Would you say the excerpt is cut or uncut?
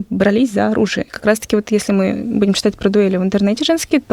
cut